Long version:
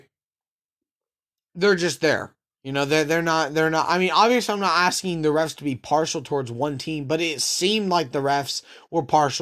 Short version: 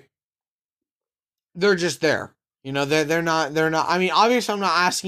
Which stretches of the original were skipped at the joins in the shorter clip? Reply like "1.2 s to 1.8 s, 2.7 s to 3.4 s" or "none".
none